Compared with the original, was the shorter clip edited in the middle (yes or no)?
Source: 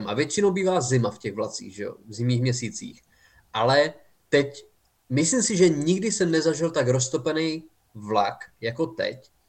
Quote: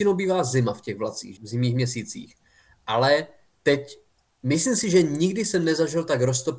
yes